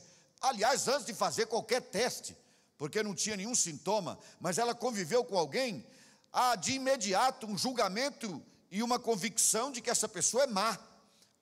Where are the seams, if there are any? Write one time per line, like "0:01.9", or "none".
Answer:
none